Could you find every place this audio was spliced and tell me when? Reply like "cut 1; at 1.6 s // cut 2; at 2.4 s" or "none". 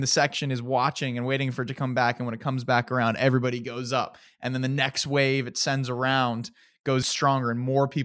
cut 1; at 7.0 s